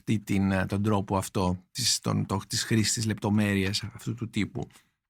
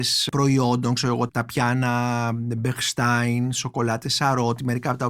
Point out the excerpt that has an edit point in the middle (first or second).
second